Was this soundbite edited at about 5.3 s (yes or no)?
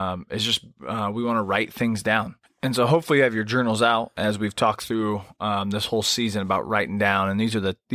no